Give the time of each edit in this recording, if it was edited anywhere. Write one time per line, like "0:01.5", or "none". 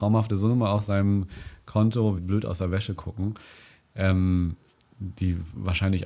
0:02.2